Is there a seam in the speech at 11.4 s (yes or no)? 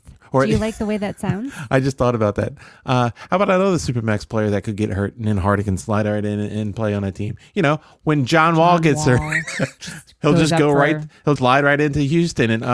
yes